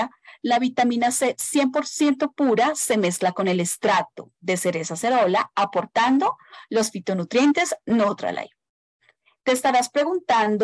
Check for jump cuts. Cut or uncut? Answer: cut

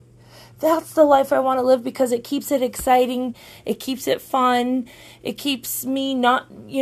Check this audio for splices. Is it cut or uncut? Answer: uncut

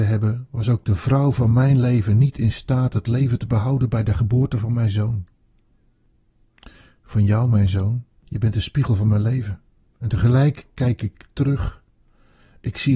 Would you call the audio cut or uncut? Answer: uncut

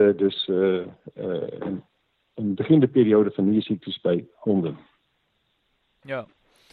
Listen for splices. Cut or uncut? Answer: uncut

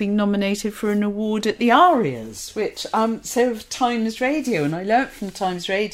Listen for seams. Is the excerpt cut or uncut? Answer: uncut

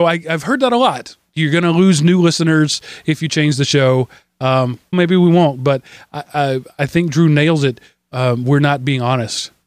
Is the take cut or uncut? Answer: cut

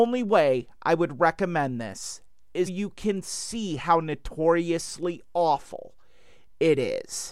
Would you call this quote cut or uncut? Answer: cut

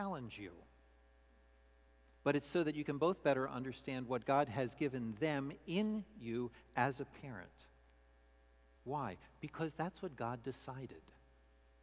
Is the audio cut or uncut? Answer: cut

